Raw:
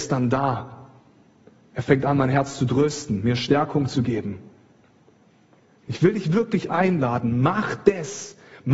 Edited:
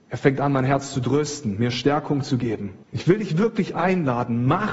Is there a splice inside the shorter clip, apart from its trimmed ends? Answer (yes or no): yes